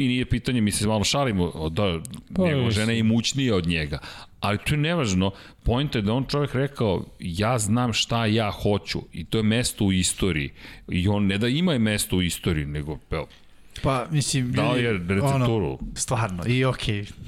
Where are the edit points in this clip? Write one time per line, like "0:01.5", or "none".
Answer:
0:16.0